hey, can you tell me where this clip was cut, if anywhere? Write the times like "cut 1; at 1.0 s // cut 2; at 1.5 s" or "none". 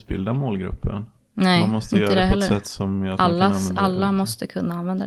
none